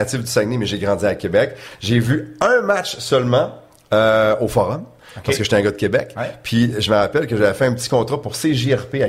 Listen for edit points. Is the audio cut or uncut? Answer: uncut